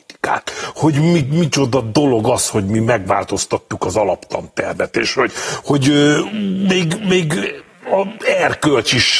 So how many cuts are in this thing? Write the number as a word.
zero